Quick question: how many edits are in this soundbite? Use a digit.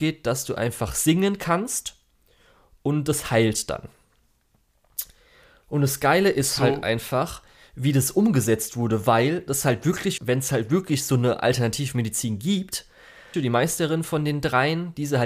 2